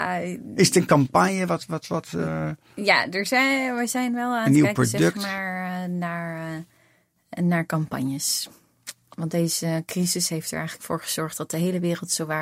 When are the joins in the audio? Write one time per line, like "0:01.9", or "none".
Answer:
none